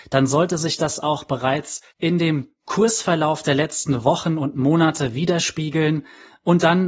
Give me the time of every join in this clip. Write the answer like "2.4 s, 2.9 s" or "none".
1.9 s